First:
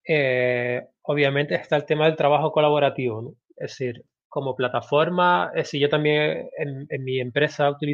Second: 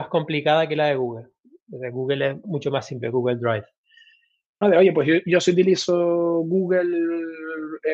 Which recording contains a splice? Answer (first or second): second